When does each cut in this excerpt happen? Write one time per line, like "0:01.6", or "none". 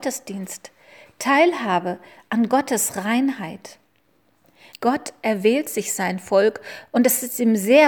0:04.7